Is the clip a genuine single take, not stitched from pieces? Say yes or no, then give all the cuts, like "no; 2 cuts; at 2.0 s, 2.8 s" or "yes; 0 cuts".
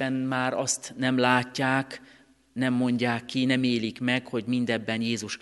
yes; 0 cuts